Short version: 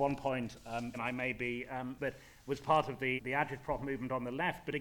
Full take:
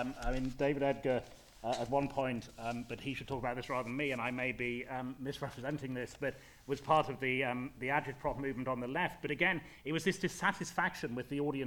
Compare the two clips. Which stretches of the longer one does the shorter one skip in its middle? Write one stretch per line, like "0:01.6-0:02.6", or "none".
0:02.9-0:04.1
0:05.2-0:06.2
0:07.4-0:07.7